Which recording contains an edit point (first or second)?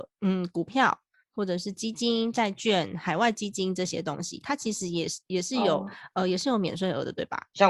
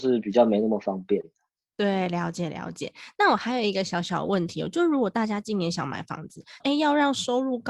second